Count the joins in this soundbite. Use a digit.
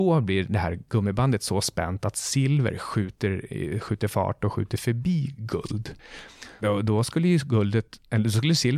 1